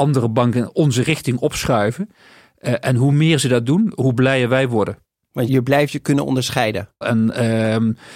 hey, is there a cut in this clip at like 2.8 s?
no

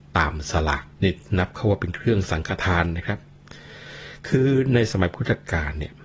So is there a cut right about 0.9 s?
yes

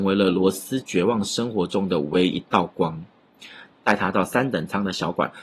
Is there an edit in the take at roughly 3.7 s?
yes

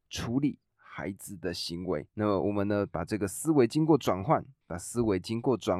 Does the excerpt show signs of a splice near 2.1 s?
yes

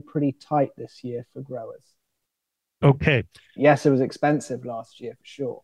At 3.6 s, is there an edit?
yes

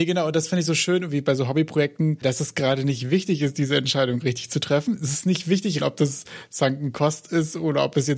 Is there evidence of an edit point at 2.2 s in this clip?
yes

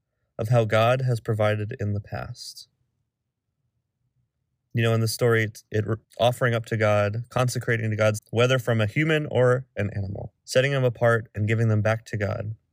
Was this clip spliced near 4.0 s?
no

